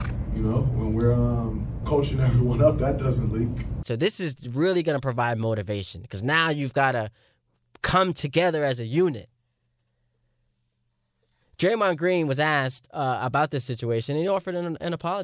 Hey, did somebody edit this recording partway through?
yes; 1 cut; at 3.8 s

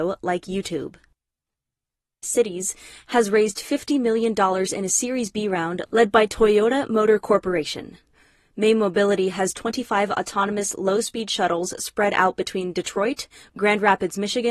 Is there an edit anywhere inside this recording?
yes; 1 cut; at 2.2 s

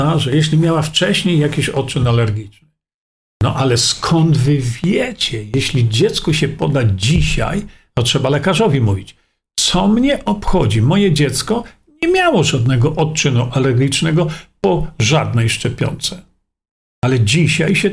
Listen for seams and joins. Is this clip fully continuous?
yes; 0 cuts

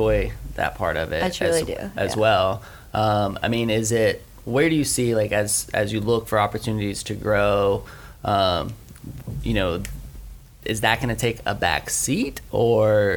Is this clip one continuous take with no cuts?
yes; 0 cuts

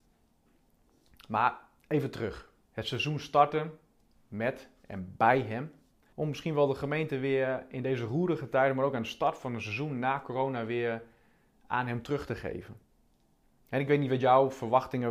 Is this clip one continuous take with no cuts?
no; 2 cuts; at 2.7 s, 6.1 s

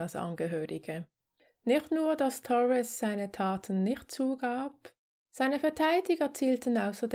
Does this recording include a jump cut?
no; 0 cuts

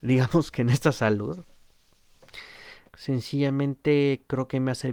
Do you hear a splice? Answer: yes; 1 cut; at 2.9 s

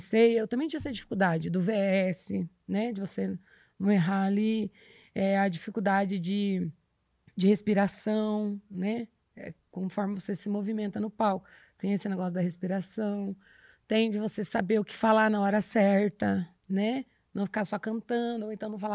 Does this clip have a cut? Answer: no; 0 cuts

